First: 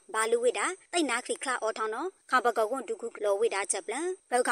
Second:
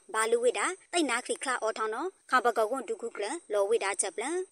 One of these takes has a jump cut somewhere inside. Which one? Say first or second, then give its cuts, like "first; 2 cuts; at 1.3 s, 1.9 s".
first; 1 cut; at 3.2 s